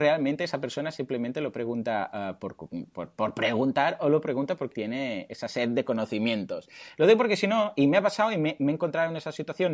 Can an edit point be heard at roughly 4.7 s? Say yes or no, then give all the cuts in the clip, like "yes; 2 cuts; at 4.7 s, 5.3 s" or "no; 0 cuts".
yes; 1 cut; at 4.7 s